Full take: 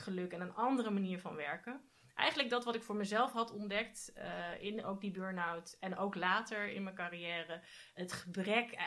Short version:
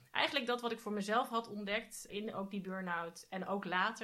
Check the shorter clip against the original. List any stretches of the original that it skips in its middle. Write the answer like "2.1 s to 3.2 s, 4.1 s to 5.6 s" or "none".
4.1 s to 4.6 s